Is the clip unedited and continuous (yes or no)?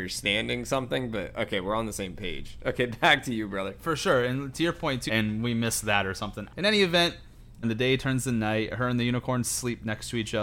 no